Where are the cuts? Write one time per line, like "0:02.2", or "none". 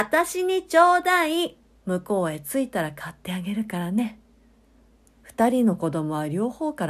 0:01.8
0:05.1